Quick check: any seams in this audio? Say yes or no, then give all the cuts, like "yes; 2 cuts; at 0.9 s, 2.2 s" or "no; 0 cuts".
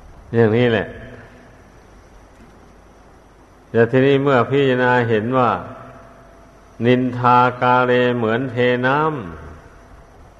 no; 0 cuts